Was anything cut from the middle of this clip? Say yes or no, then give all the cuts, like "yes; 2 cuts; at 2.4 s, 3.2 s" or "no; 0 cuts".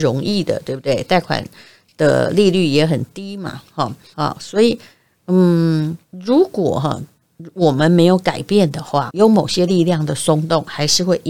yes; 3 cuts; at 4.1 s, 6.0 s, 9.1 s